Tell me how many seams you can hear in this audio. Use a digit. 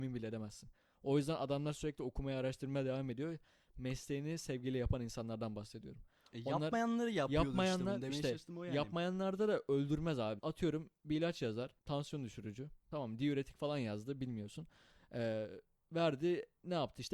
1